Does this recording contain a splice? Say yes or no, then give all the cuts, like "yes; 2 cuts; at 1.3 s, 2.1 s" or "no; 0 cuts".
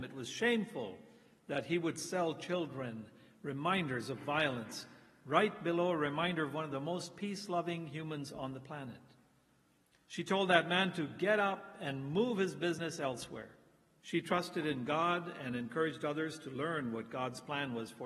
yes; 1 cut; at 14.0 s